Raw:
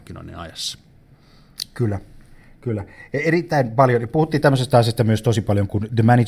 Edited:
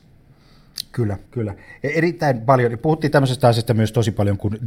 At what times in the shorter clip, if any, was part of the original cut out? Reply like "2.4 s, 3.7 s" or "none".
1.3 s